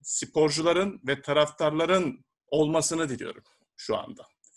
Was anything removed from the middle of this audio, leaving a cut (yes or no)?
yes